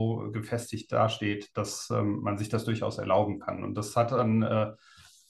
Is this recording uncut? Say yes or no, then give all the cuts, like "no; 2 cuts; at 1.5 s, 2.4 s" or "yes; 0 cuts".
yes; 0 cuts